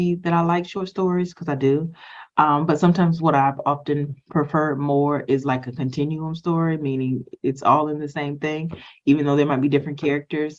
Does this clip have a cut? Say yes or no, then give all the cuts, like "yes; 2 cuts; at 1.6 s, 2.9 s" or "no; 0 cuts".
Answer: no; 0 cuts